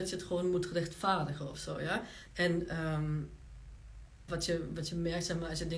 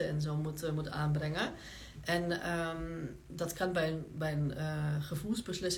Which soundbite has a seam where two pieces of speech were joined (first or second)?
first